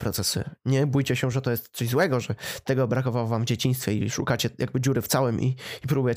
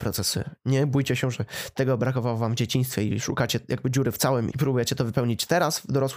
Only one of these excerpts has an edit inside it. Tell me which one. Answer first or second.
second